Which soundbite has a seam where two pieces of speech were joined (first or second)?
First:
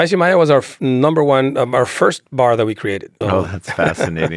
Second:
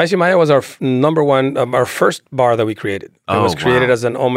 first